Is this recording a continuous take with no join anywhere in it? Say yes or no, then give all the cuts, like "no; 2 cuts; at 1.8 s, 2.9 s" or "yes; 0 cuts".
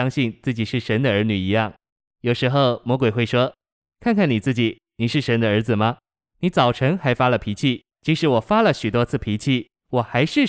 no; 1 cut; at 7.9 s